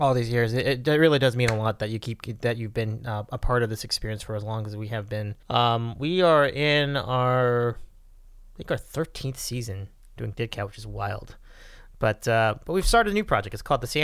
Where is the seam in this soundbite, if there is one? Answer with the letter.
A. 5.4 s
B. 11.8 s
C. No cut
A